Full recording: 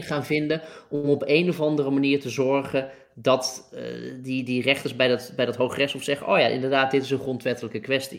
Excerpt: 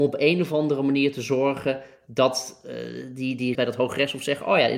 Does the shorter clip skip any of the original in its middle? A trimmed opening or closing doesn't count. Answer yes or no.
yes